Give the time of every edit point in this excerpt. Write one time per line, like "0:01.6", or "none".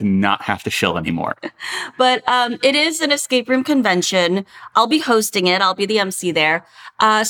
none